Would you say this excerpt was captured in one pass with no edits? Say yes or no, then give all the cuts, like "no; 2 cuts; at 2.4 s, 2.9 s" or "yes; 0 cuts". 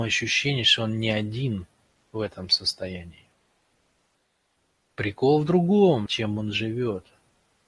no; 2 cuts; at 4.9 s, 6.1 s